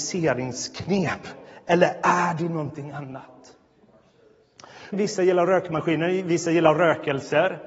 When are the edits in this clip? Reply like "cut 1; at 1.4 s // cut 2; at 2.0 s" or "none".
cut 1; at 4.9 s

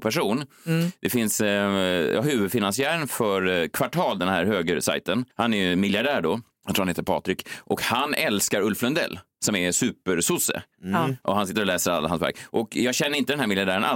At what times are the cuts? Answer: cut 1; at 5.3 s

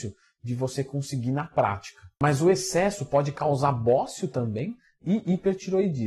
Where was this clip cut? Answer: none

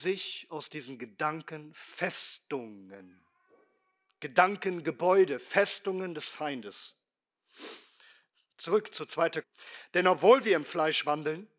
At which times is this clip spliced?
cut 1; at 9.4 s

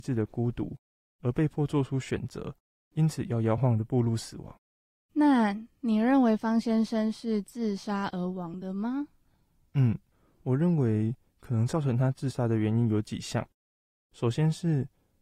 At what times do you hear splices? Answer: cut 1; at 3.6 s

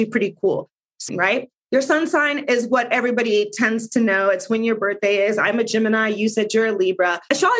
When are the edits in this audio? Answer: cut 1; at 1.1 s

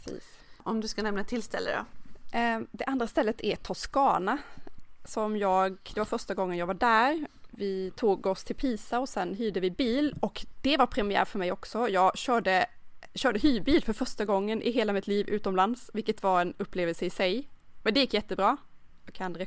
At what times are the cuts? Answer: none

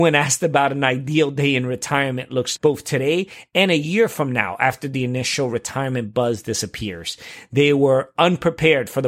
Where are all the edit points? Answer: cut 1; at 2.6 s

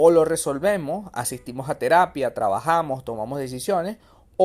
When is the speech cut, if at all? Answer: none

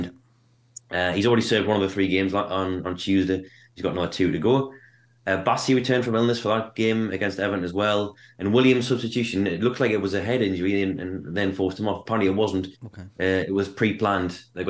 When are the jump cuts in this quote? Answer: none

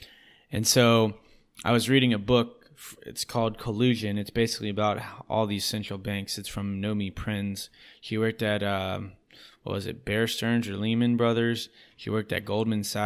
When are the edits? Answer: none

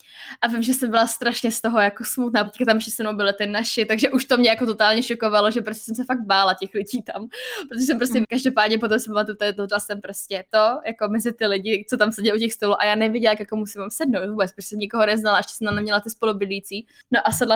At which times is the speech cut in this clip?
cut 1; at 2.5 s // cut 2; at 8.2 s // cut 3; at 9.7 s

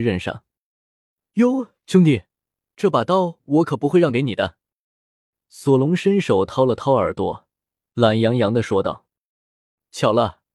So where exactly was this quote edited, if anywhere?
none

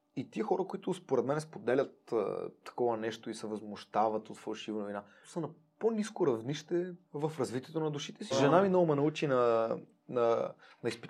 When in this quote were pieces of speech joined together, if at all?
cut 1; at 5.2 s // cut 2; at 7.0 s // cut 3; at 8.3 s

